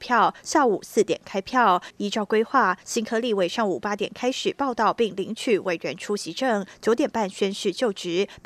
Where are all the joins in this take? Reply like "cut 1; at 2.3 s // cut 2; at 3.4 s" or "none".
cut 1; at 1.9 s